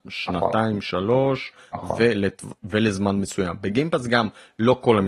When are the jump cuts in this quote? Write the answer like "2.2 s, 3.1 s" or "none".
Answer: 2.6 s